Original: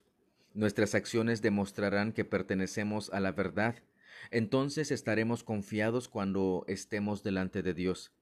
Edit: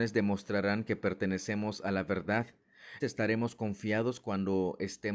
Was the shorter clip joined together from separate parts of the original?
yes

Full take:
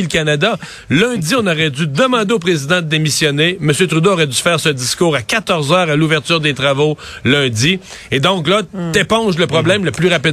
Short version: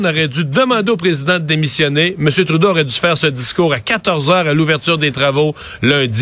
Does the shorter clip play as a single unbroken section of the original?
yes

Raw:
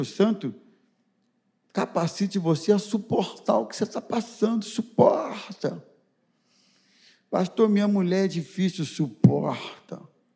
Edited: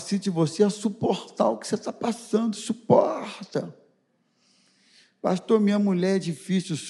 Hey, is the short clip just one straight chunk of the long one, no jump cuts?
yes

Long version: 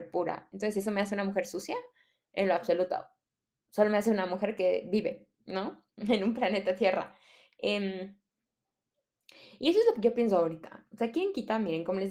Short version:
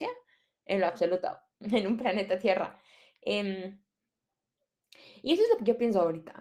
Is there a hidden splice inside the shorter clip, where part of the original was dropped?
yes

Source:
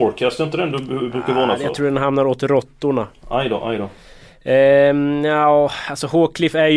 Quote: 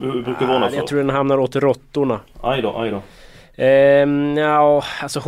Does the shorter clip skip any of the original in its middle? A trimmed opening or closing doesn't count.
no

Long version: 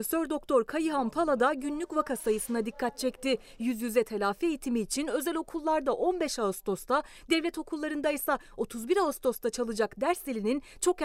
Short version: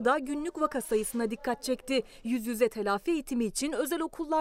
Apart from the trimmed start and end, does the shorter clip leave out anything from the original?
no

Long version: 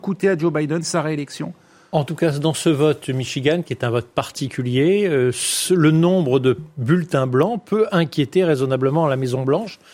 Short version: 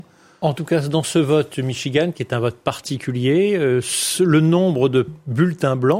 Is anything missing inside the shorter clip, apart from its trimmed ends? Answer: no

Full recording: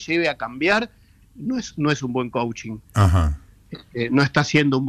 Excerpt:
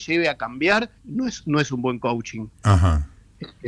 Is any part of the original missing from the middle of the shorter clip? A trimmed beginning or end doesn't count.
yes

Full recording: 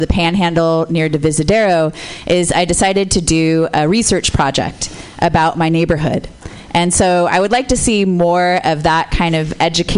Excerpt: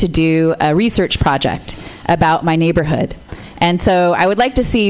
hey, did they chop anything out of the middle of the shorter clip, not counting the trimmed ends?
no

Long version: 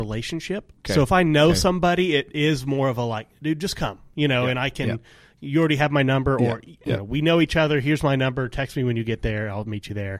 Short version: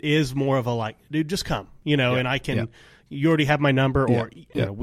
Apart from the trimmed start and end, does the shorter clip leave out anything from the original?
no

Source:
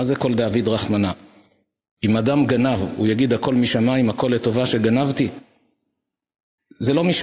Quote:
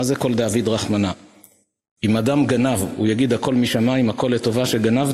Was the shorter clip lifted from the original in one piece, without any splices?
yes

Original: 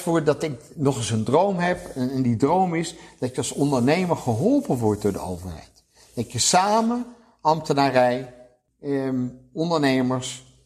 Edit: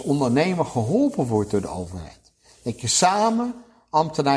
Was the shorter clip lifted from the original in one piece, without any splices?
yes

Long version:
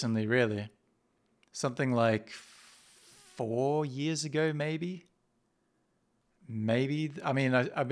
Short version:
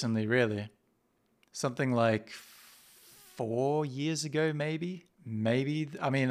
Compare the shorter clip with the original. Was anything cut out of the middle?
yes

